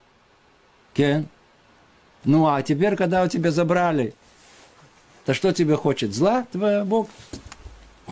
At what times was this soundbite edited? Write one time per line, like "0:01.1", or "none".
none